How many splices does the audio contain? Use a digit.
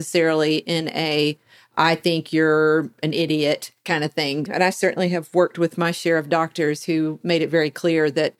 1